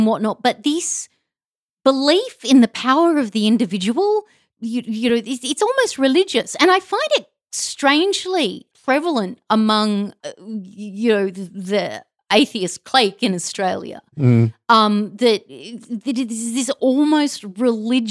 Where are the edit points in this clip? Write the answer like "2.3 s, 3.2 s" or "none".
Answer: none